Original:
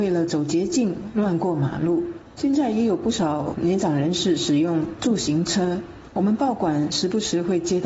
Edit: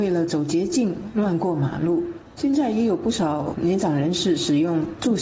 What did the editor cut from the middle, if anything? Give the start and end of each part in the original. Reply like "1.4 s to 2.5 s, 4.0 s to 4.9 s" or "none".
none